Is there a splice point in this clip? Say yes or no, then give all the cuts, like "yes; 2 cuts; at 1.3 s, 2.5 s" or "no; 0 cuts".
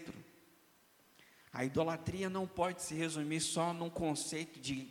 no; 0 cuts